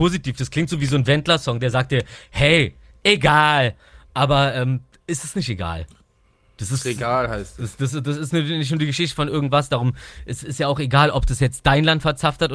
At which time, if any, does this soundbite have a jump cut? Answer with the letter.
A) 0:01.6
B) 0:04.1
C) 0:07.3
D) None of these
D